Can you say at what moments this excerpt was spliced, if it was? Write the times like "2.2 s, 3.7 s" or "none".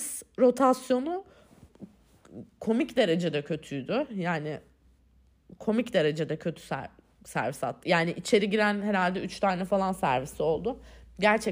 7.8 s